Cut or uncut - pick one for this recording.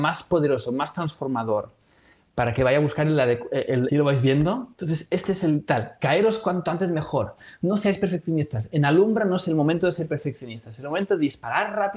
cut